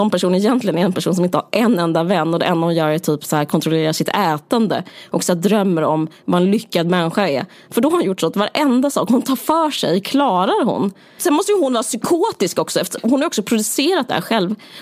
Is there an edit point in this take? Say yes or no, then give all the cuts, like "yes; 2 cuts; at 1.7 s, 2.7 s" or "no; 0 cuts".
yes; 2 cuts; at 7.7 s, 11.2 s